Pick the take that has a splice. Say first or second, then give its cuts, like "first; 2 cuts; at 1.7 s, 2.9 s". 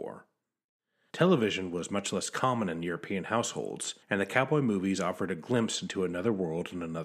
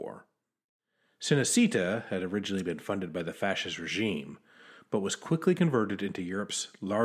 first; 2 cuts; at 1.1 s, 4.0 s